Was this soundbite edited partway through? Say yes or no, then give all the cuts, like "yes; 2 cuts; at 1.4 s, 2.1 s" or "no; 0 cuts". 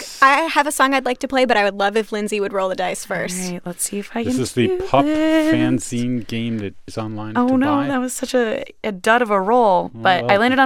yes; 1 cut; at 6.9 s